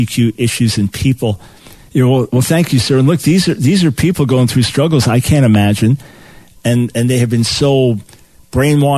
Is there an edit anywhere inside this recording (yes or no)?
yes